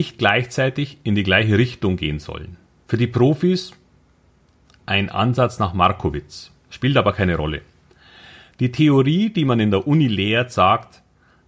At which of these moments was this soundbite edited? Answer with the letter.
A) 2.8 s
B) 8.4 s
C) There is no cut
A